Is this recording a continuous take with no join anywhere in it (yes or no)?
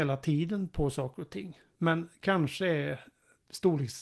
yes